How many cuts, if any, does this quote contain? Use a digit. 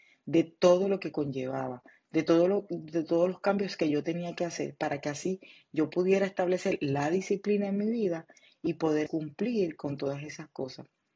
1